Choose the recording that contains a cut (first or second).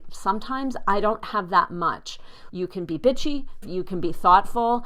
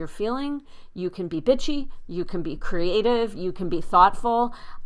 first